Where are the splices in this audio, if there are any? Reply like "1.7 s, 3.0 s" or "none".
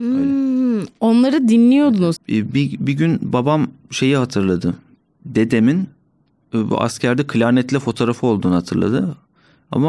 2.2 s